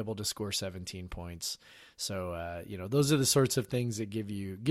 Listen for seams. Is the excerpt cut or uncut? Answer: uncut